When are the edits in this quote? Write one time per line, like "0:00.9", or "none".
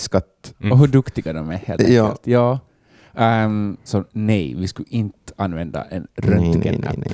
0:03.9